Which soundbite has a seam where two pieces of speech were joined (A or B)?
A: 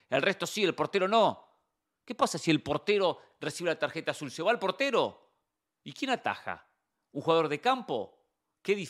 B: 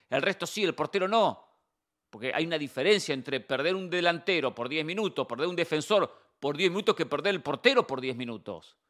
A